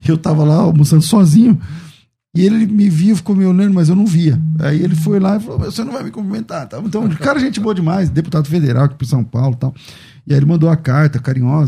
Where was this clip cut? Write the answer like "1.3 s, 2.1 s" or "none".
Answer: none